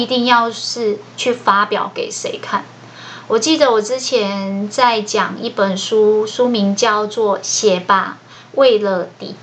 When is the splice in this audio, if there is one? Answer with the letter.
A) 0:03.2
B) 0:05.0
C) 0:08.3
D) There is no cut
D